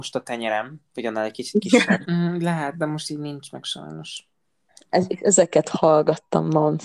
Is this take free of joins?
no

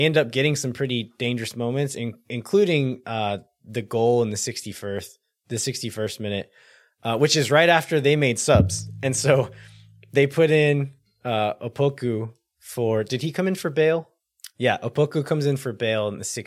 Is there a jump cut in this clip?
no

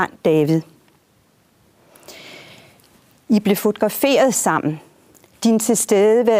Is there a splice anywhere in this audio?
yes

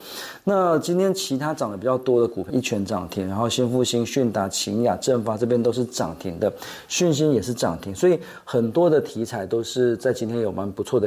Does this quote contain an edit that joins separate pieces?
yes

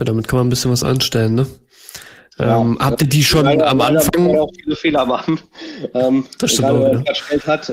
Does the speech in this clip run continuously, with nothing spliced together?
yes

